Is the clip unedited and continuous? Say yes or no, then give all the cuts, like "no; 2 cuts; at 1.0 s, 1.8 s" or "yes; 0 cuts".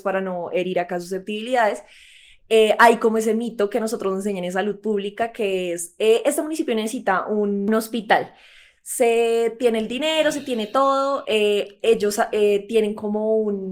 yes; 0 cuts